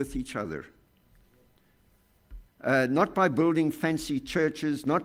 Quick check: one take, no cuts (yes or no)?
no